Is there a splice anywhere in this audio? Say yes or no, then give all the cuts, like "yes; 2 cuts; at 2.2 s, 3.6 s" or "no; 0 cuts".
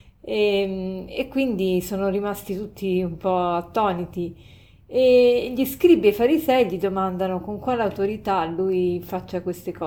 no; 0 cuts